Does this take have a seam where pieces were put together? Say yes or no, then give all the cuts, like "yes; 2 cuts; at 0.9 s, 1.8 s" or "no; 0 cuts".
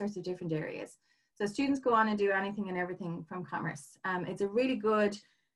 no; 0 cuts